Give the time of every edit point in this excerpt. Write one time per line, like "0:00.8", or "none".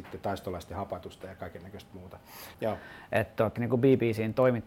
0:02.5
0:03.6